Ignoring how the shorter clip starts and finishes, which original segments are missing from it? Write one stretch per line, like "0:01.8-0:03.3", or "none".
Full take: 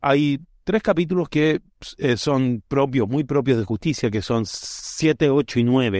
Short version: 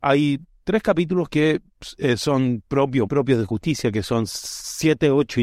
0:03.1-0:03.3